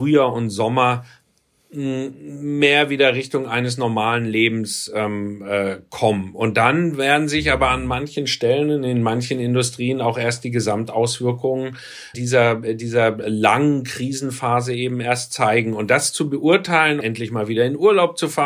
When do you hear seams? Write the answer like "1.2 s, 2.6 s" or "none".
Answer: 12.1 s, 17.0 s